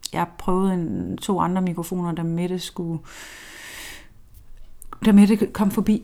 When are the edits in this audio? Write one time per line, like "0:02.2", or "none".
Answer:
none